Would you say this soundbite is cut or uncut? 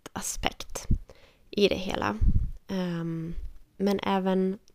uncut